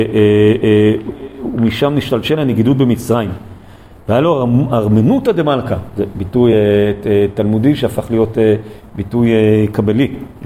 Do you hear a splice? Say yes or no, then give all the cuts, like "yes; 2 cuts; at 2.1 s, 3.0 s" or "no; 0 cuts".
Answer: no; 0 cuts